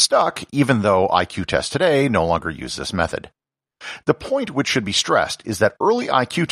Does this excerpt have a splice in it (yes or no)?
no